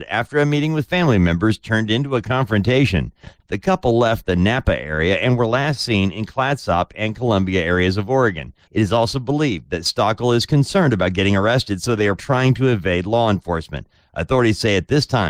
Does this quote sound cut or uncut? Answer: cut